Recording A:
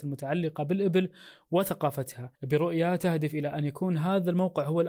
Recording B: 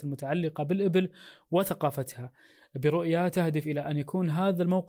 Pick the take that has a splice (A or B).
A